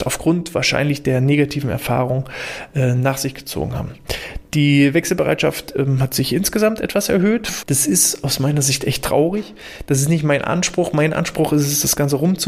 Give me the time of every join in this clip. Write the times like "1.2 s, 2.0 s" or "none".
7.6 s